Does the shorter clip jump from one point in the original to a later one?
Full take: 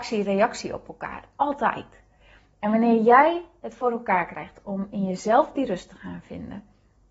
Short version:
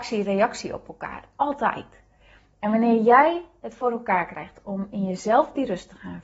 no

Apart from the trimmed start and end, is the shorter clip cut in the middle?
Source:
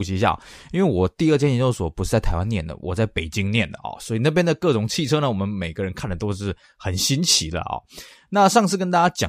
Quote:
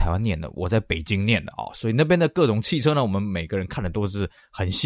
no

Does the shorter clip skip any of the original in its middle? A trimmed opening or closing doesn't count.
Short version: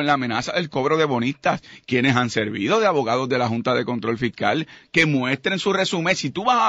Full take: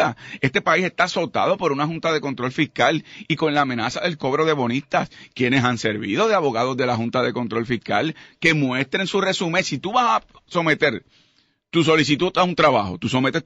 no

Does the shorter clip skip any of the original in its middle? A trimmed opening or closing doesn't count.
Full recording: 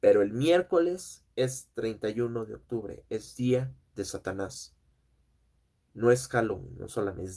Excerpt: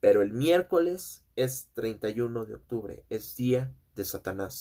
no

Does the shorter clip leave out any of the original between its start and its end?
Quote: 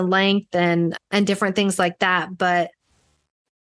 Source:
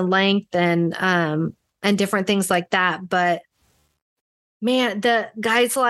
yes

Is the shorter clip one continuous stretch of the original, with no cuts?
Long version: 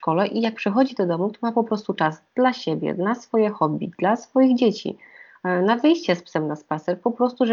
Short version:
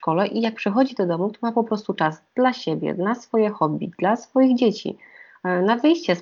yes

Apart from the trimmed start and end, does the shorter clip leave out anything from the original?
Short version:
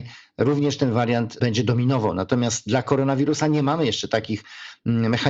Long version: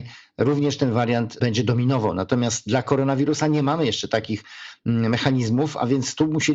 no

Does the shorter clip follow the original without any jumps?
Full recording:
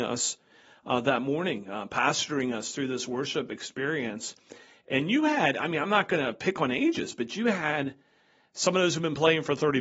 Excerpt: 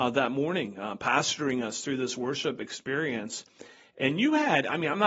yes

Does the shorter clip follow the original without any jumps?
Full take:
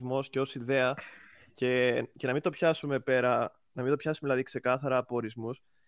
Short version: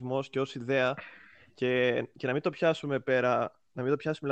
yes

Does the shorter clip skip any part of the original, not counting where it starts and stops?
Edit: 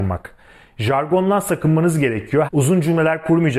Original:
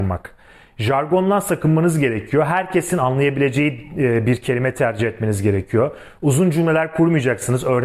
yes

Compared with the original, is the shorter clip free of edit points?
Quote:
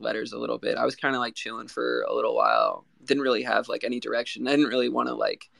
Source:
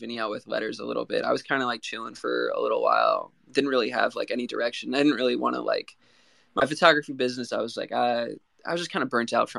yes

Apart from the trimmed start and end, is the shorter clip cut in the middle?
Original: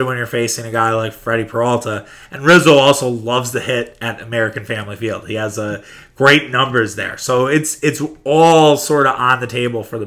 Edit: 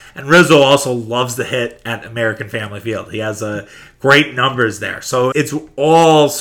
yes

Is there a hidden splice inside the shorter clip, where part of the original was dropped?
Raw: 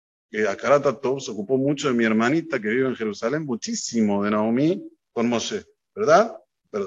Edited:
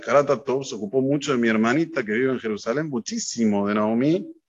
no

